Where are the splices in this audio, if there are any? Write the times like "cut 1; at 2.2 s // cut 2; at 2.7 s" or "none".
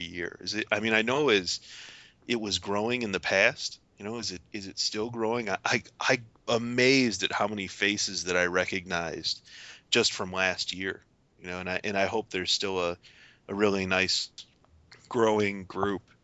none